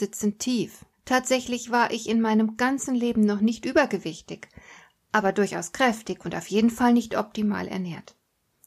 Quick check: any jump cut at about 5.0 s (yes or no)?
no